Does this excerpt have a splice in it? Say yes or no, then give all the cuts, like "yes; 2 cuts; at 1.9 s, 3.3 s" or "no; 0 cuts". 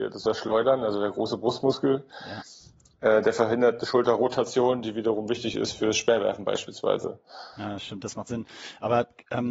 no; 0 cuts